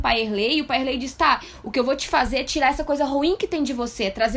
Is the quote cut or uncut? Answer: uncut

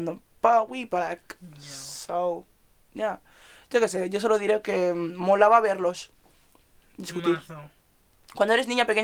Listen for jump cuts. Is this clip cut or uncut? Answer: uncut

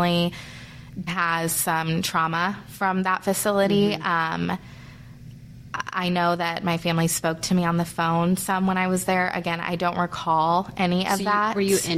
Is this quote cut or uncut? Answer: cut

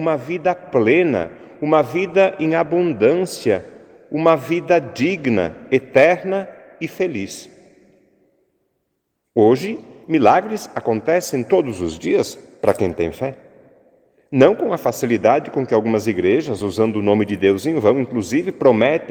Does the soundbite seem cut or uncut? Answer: uncut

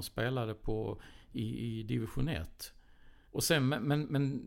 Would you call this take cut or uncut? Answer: cut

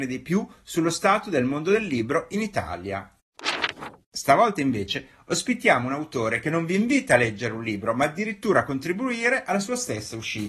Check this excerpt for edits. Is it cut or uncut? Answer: cut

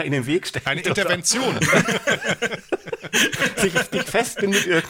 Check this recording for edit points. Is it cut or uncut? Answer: uncut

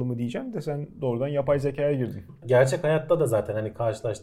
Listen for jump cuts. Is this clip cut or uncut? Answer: cut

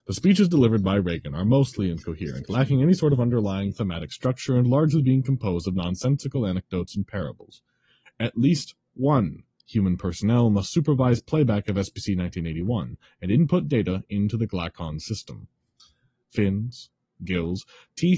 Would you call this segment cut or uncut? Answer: cut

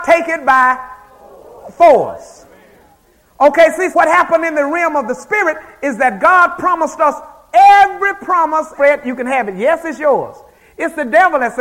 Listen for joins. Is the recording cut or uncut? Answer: cut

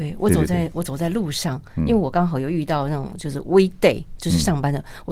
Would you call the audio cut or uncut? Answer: uncut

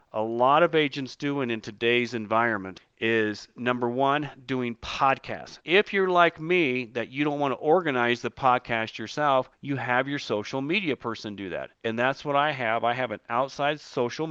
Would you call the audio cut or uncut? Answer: cut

